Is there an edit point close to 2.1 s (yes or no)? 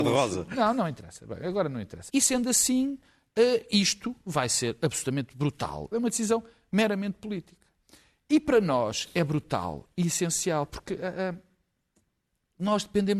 yes